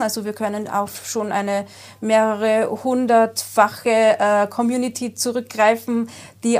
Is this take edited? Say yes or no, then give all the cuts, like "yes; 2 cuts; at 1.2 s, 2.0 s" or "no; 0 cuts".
no; 0 cuts